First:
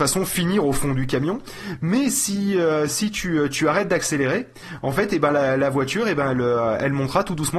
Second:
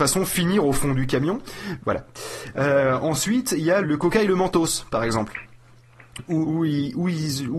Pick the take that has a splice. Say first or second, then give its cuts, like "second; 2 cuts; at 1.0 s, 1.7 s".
second; 3 cuts; at 1.8 s, 3.8 s, 6.4 s